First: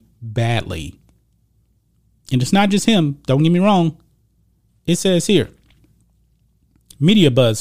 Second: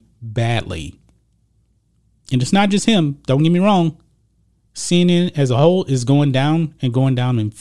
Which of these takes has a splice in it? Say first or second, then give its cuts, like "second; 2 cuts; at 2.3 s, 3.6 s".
first; 1 cut; at 4.7 s